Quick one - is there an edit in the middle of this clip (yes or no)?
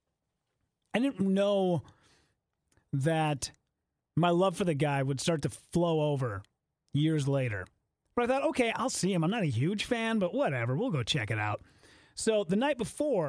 no